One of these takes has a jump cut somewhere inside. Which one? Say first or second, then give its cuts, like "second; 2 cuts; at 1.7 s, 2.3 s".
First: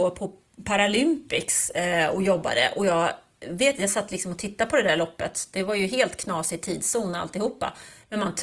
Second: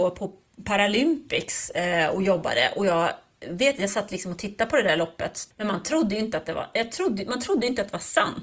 second; 1 cut; at 5.5 s